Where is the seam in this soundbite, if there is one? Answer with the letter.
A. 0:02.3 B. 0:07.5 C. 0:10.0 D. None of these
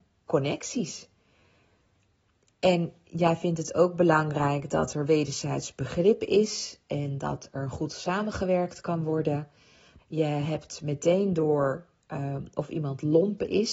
C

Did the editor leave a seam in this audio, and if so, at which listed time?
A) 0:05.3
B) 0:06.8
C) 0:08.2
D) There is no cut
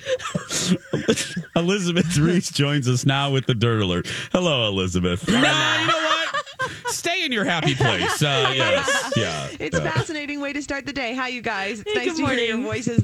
A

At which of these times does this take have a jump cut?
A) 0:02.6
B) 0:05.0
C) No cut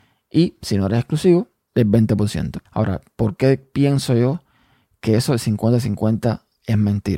A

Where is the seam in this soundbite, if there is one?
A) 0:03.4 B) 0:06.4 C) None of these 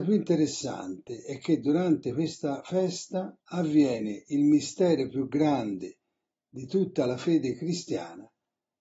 A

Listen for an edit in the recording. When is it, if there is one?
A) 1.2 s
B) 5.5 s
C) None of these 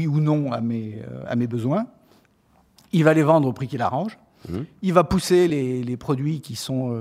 C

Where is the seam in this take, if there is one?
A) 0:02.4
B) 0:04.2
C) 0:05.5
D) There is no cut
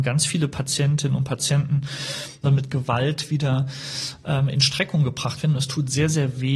A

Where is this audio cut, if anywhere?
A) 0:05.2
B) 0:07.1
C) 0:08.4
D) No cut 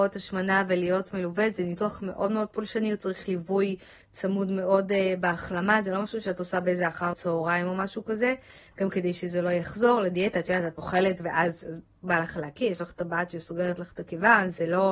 B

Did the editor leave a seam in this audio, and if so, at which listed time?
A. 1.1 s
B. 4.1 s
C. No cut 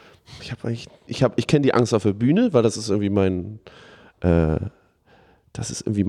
A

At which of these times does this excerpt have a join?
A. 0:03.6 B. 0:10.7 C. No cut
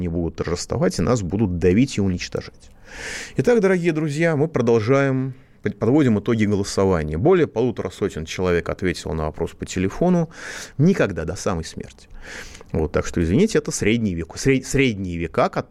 B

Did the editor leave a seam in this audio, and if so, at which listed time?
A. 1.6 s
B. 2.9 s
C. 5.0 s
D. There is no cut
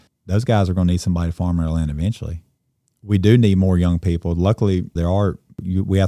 C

